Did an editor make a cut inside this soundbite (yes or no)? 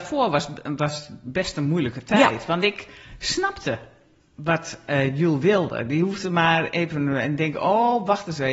no